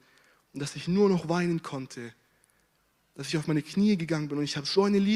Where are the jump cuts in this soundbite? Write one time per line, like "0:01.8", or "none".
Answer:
none